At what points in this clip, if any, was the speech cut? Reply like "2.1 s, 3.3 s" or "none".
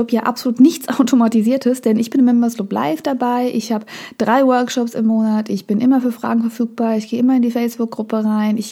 none